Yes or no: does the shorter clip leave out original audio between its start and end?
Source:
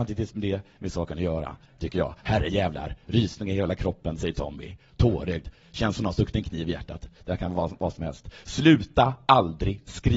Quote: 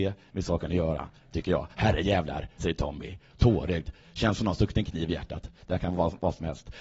yes